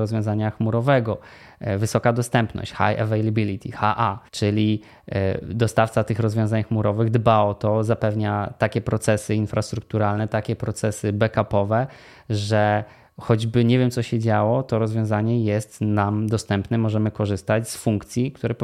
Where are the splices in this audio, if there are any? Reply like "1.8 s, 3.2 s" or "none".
4.3 s

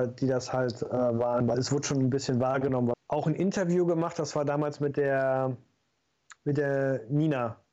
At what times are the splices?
2.9 s, 6.4 s

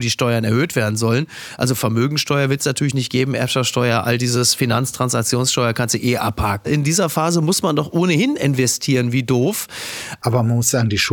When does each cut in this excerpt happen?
6.6 s, 10.2 s

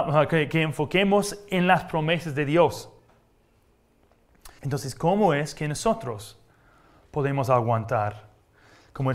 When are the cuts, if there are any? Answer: 4.6 s

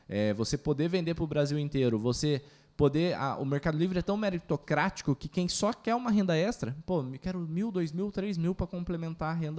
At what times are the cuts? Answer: none

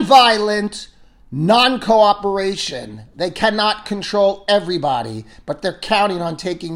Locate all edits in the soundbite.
none

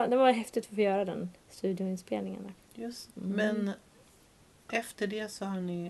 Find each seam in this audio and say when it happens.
1.4 s, 3.1 s

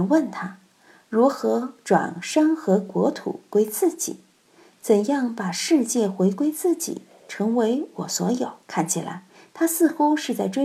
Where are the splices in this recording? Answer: 8.6 s

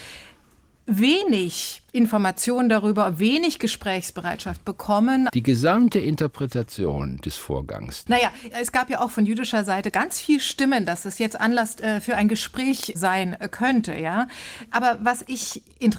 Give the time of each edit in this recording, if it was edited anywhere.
5.3 s, 8.1 s

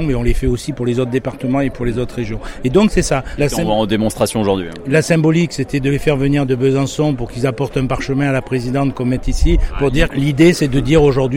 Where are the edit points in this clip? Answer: 3.4 s, 10.1 s

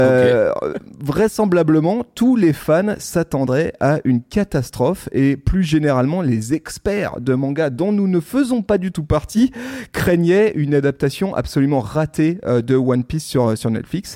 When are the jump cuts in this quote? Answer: none

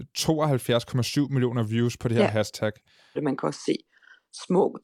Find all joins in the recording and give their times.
3.2 s

